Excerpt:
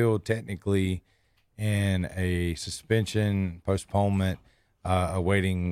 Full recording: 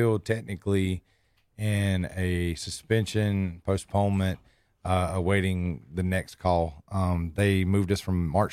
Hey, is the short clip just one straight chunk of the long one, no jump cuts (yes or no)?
yes